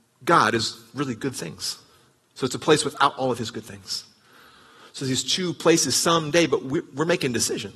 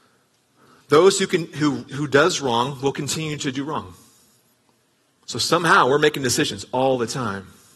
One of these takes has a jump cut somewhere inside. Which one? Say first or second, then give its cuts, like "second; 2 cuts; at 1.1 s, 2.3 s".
second; 2 cuts; at 1.9 s, 5.1 s